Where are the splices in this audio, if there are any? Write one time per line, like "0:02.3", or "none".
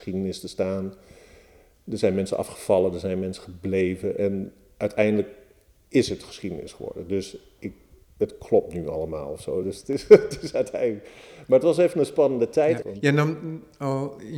0:09.6
0:12.8